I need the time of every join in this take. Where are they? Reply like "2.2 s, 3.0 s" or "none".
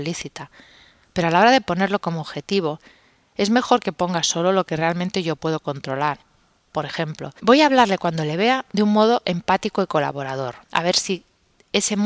7.4 s, 10.6 s